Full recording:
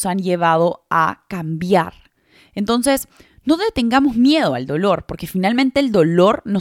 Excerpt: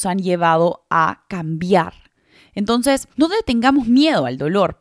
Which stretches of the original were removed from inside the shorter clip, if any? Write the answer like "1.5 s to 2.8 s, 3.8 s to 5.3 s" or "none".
3.1 s to 3.4 s